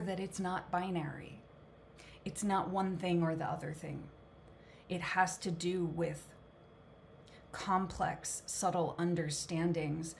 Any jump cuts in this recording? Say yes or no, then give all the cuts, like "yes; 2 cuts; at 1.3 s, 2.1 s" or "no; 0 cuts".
no; 0 cuts